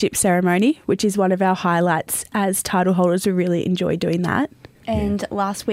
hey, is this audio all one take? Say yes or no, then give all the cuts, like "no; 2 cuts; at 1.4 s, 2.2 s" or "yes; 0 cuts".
no; 1 cut; at 4.8 s